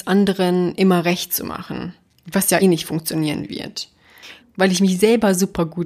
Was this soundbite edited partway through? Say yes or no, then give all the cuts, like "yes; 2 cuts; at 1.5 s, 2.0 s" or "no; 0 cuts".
yes; 2 cuts; at 2.6 s, 4.4 s